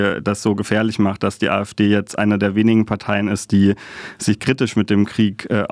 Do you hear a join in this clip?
no; 0 cuts

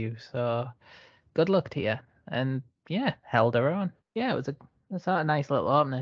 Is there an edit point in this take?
yes; 1 cut; at 4.0 s

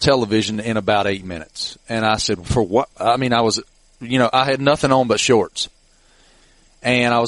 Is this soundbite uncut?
yes; 0 cuts

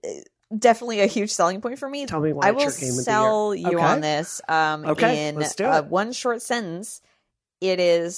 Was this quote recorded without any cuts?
no; 1 cut; at 2.1 s

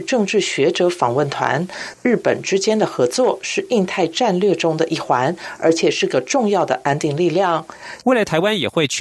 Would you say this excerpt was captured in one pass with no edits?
no; 2 cuts; at 1.9 s, 8.0 s

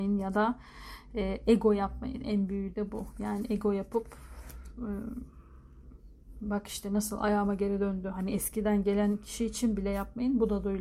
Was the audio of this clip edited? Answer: no; 0 cuts

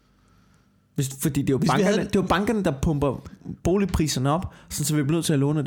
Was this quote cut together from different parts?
no; 0 cuts

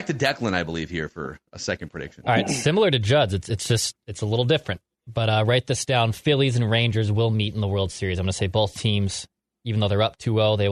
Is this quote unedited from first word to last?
yes; 0 cuts

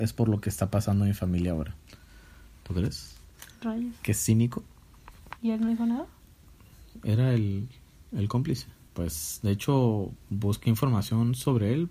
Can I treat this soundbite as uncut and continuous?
no; 2 cuts; at 5.4 s, 8.9 s

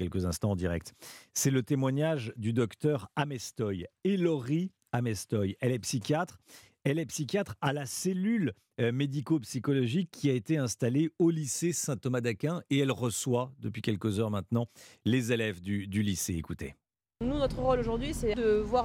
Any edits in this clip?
no; 0 cuts

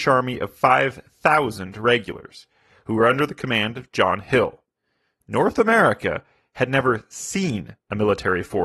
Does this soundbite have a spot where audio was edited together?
no; 0 cuts

